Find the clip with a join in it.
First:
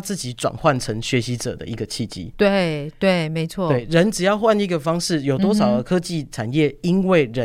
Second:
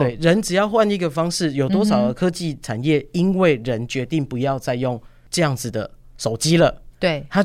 first; 1 cut; at 2.3 s

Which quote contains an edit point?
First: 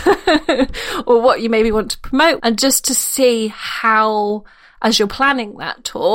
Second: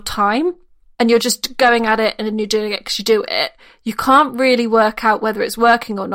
first; 1 cut; at 2.4 s

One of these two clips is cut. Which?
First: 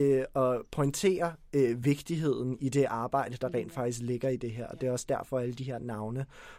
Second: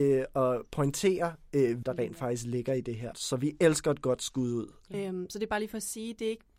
second; 3 cuts; at 1.8 s, 3.1 s, 4.9 s

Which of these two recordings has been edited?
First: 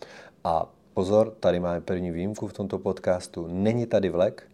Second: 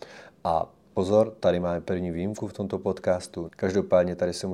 second; 1 cut; at 3.5 s

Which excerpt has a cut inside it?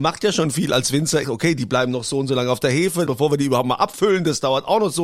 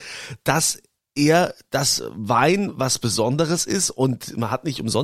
first; 2 cuts; at 1.2 s, 3.0 s

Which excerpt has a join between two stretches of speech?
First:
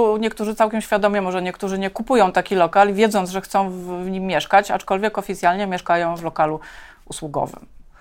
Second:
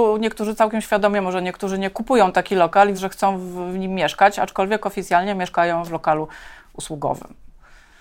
second; 1 cut; at 2.9 s

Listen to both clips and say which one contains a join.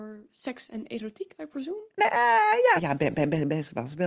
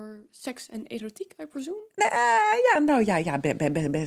first; 1 cut; at 2.8 s

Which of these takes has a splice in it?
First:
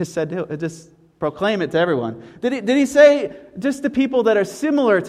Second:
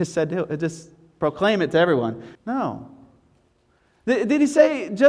second; 1 cut; at 2.3 s

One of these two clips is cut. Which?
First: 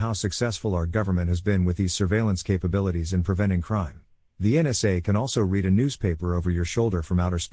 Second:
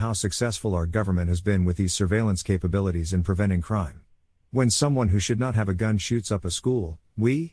first; 1 cut; at 4.2 s

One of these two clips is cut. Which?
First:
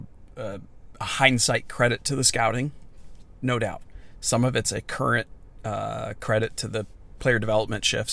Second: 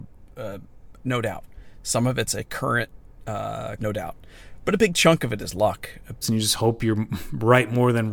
second; 3 cuts; at 0.9 s, 3.8 s, 6.2 s

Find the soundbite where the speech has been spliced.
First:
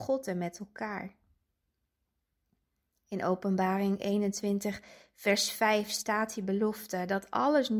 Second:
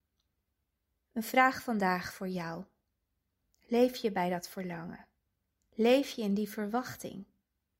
second; 1 cut; at 0.9 s

